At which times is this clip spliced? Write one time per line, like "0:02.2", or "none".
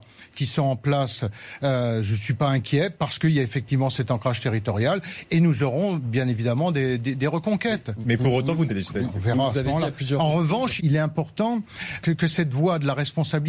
0:08.7
0:10.8
0:12.0